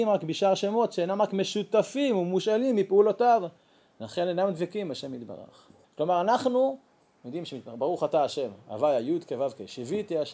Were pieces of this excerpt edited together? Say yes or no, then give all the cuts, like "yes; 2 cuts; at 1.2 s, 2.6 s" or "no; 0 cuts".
yes; 1 cut; at 5.8 s